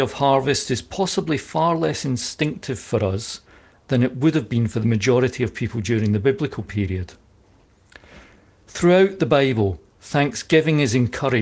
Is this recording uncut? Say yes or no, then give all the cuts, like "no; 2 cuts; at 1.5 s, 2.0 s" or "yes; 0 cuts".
yes; 0 cuts